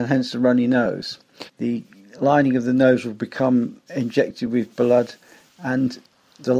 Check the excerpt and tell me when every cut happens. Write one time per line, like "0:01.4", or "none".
0:01.5
0:03.9